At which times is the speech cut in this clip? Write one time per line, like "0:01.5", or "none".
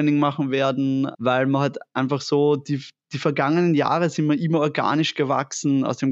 0:01.1